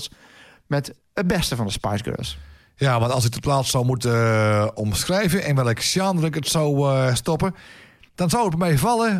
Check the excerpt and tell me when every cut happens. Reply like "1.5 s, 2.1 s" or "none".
none

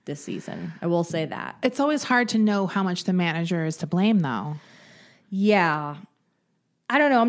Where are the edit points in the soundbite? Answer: none

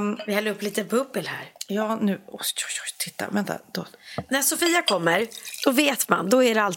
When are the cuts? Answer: none

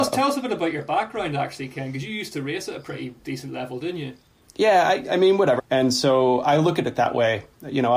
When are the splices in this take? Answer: 5.6 s

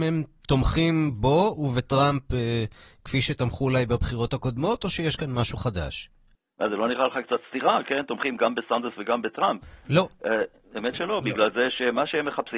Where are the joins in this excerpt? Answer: 9.9 s

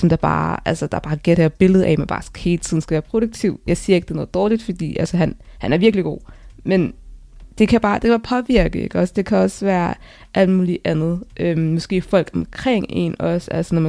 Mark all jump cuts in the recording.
none

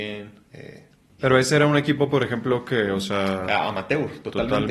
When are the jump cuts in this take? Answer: 1.1 s

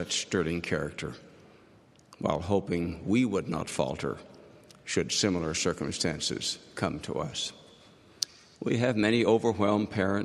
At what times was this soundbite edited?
8.6 s

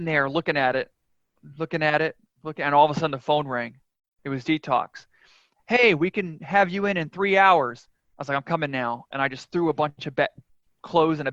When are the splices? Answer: none

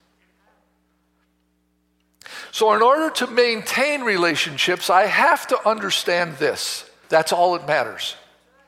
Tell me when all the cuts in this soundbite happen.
7.0 s

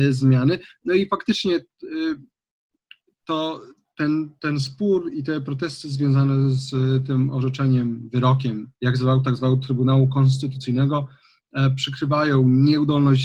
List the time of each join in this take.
3.9 s, 8.8 s

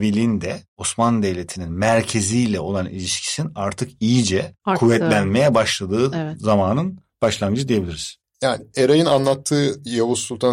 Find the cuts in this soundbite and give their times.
none

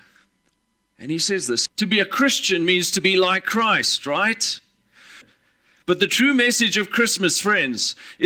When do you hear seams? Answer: 1.7 s, 5.2 s

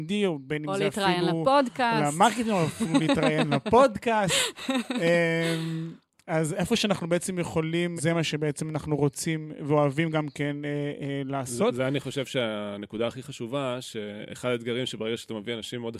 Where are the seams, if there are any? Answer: 8.0 s

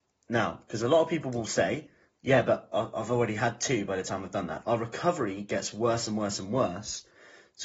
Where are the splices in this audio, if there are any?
4.6 s

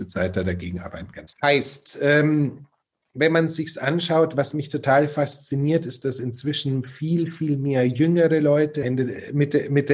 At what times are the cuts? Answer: 1.3 s, 8.8 s

